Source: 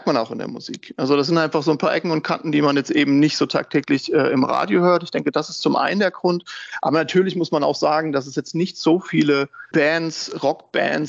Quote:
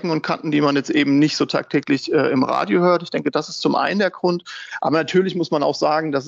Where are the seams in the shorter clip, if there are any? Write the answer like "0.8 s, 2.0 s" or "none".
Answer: none